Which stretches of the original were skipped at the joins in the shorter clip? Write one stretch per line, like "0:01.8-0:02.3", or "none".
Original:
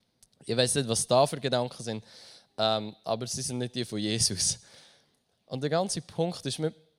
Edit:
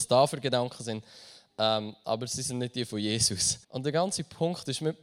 0:04.6-0:05.4